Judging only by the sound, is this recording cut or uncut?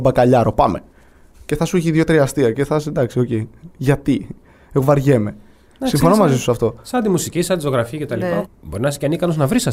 cut